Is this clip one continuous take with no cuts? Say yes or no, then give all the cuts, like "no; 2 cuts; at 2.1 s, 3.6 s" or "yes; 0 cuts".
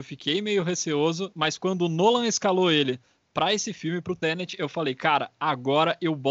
yes; 0 cuts